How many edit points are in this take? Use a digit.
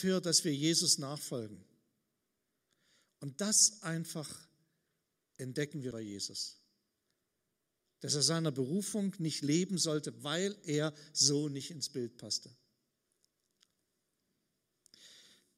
1